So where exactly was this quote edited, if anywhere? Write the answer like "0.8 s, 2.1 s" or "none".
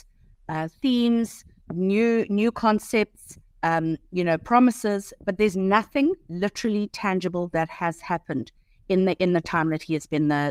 none